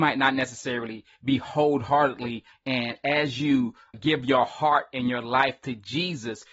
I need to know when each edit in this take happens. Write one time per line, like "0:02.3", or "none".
0:02.5
0:03.9